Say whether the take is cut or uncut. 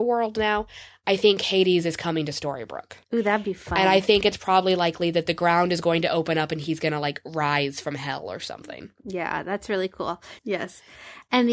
cut